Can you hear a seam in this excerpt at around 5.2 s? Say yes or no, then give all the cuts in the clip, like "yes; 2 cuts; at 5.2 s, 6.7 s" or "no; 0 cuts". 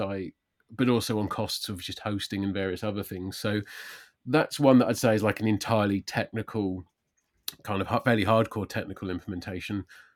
no; 0 cuts